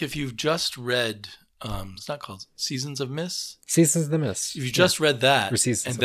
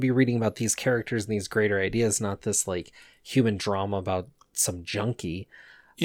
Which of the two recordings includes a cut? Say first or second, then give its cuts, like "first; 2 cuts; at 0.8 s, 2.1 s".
first; 1 cut; at 2.0 s